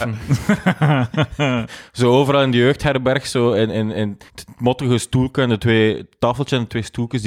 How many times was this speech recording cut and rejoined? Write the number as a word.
one